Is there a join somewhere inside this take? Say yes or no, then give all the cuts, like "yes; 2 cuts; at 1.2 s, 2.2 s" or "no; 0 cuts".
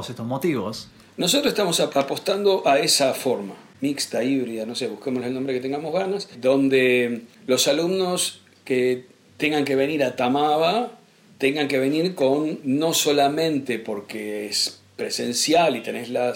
no; 0 cuts